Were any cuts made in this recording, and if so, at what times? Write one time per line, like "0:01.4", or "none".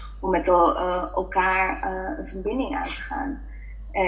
none